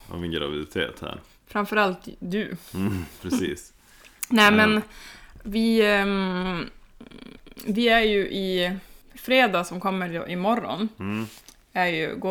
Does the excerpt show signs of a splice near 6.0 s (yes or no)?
no